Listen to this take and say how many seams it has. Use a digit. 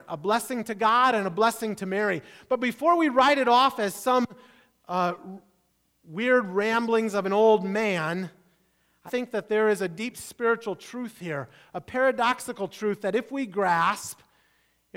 1